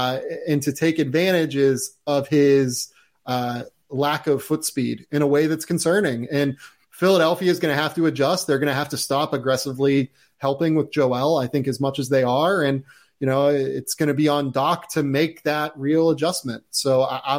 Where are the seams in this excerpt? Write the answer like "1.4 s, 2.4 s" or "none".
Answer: none